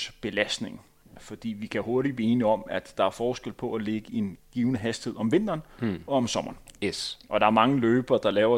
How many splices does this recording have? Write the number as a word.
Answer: zero